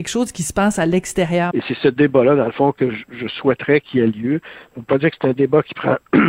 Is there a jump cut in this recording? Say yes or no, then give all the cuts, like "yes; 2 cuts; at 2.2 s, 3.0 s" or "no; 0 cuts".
yes; 1 cut; at 1.5 s